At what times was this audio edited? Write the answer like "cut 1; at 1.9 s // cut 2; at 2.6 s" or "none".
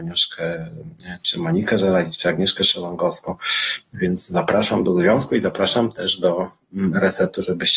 none